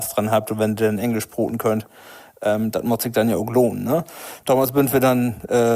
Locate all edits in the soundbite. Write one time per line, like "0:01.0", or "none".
none